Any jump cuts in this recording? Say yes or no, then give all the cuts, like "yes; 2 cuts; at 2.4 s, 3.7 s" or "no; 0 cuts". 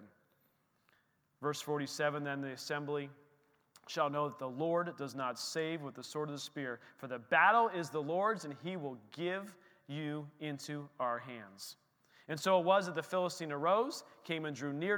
no; 0 cuts